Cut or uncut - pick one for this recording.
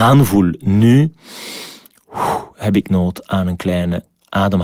uncut